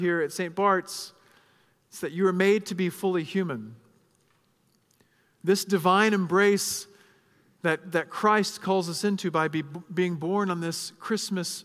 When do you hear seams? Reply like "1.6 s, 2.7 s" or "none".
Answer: none

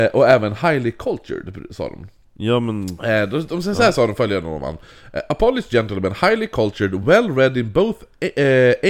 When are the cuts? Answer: none

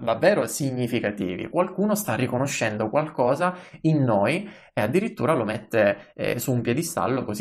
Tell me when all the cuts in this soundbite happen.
none

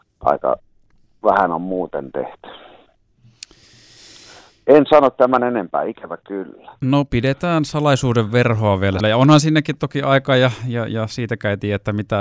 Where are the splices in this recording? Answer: 9.0 s

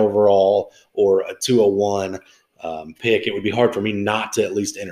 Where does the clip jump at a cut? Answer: none

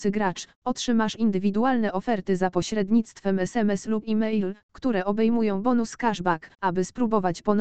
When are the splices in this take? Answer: 6.5 s

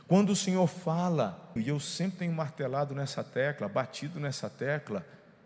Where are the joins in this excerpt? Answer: 1.6 s

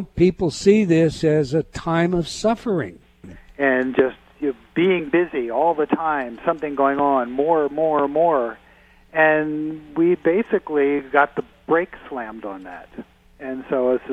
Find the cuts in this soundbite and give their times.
3.2 s

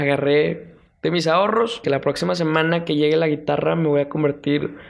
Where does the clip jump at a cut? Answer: 1.8 s

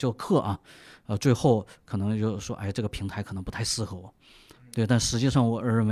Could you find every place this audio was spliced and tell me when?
none

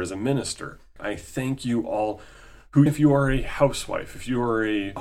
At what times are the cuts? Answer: 1.0 s, 2.9 s

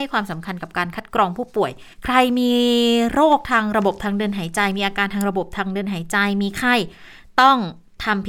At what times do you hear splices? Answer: 1.9 s

